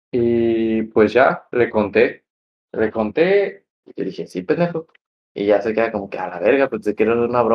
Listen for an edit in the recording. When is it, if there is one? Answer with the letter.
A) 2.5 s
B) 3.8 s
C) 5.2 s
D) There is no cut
B